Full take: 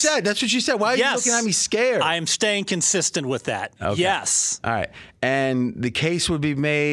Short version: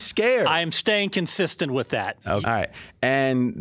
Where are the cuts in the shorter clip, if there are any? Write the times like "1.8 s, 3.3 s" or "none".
2.4 s